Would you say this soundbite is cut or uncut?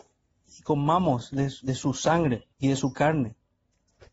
cut